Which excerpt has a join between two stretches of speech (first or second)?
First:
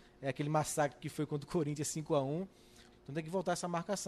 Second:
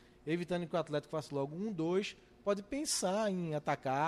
first